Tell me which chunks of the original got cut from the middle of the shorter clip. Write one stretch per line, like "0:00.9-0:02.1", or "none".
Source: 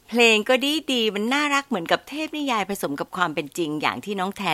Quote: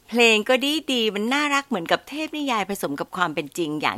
none